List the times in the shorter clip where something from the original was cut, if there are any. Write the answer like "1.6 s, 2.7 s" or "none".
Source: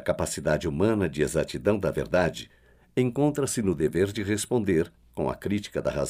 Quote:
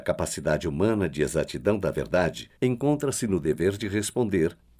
2.6 s